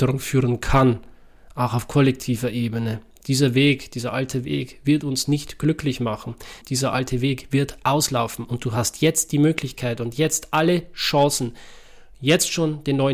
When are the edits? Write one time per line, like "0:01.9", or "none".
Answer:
0:06.6